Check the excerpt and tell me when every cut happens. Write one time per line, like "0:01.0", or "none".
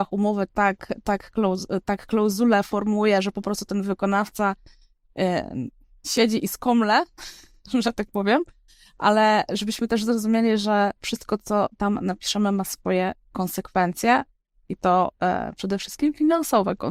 none